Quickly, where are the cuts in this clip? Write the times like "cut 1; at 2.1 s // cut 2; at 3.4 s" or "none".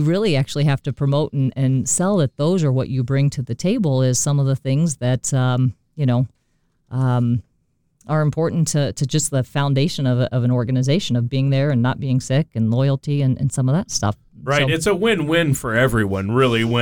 none